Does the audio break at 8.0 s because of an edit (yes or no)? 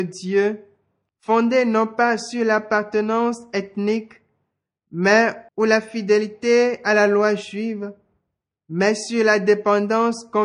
no